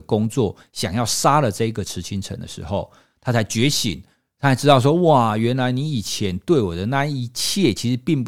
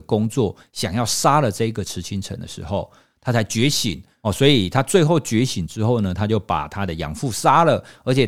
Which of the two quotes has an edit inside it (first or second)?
second